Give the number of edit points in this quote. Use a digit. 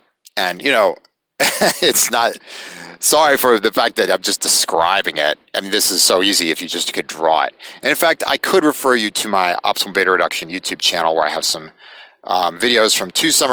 0